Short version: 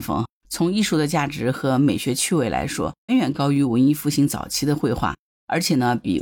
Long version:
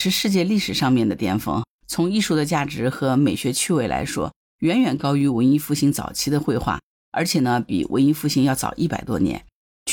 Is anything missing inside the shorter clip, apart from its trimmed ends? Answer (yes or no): yes